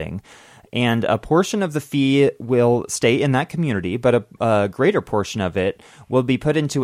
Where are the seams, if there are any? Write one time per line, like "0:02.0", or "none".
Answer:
none